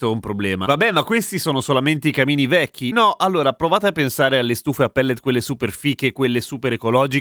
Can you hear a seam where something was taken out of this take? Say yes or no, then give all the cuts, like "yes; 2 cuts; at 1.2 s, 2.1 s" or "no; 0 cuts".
no; 0 cuts